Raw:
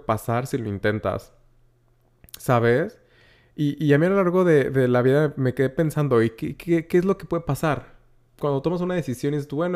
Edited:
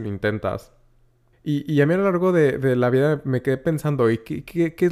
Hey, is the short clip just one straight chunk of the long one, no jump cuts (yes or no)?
no